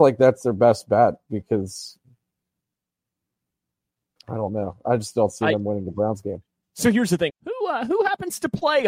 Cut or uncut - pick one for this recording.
cut